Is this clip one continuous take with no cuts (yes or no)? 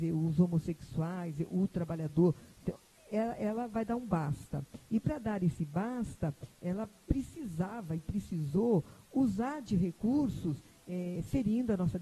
yes